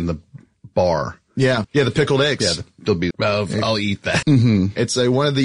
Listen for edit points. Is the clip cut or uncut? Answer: cut